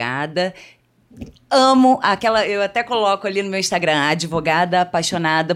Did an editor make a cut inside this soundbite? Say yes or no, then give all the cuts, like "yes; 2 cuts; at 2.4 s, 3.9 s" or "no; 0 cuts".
no; 0 cuts